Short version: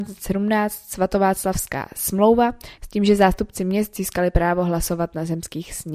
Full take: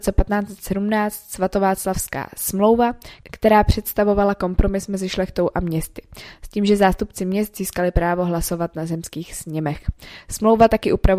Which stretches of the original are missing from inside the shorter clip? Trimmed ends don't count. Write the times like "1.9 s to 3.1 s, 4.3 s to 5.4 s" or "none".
3.2 s to 6.4 s